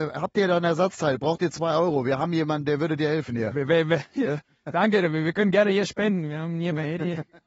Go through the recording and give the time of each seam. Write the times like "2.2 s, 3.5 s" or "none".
none